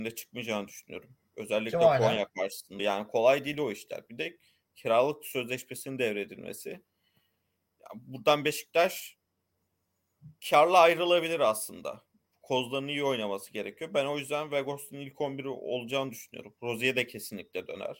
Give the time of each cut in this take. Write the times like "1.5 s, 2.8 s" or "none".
2.8 s, 10.4 s